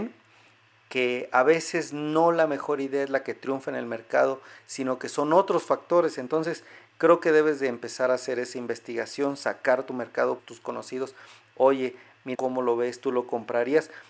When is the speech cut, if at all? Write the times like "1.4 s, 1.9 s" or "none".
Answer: 10.4 s, 12.3 s